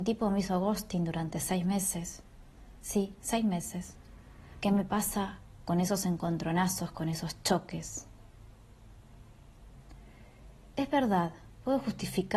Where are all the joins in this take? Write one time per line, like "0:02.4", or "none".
0:04.6
0:10.7